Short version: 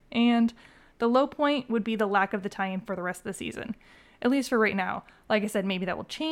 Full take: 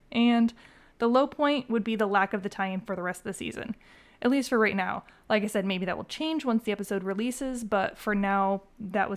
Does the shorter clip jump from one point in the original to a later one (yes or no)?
no